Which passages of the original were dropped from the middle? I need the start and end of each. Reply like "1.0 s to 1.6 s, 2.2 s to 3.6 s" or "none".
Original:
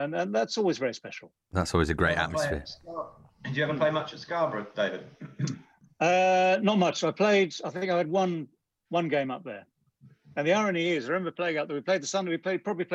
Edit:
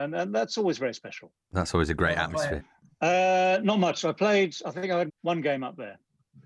2.6 s to 5.6 s, 8.1 s to 8.8 s